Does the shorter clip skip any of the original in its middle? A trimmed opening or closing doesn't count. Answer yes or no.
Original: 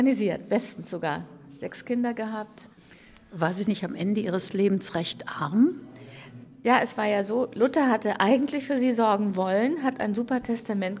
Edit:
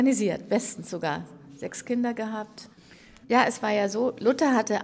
yes